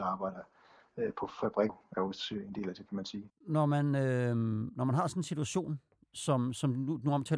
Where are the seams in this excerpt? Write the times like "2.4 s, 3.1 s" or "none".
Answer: 1.7 s, 3.3 s